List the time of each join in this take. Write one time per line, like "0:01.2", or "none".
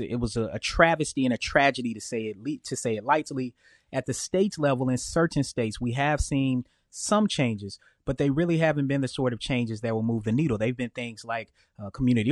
none